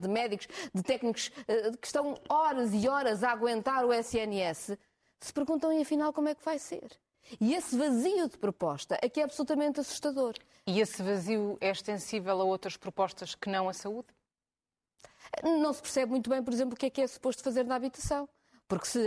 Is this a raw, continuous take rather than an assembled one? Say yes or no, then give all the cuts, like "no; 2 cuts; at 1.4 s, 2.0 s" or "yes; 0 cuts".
yes; 0 cuts